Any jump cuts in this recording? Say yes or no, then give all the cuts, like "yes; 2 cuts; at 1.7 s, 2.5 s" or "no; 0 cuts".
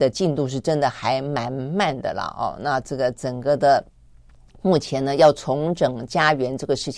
no; 0 cuts